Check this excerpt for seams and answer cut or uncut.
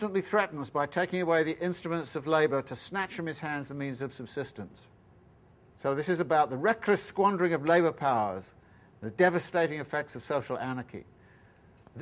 cut